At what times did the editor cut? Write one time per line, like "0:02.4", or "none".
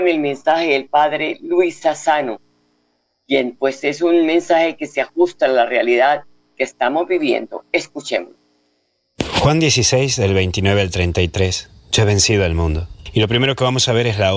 none